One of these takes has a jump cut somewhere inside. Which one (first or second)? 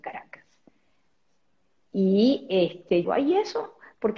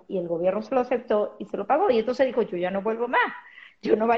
first